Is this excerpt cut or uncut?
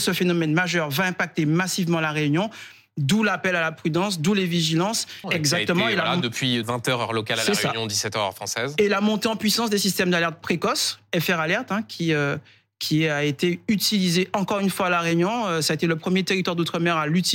cut